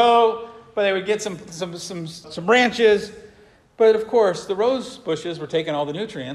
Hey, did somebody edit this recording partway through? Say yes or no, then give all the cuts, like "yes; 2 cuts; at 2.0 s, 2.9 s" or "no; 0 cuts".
yes; 1 cut; at 2.2 s